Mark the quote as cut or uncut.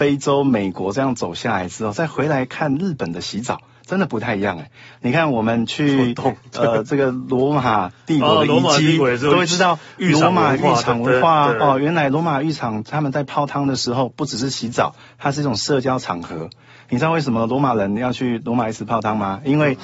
uncut